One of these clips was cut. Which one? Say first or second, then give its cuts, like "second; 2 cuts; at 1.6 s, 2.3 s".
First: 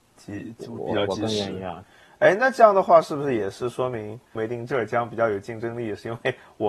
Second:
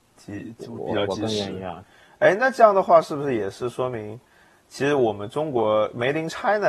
first; 1 cut; at 4.4 s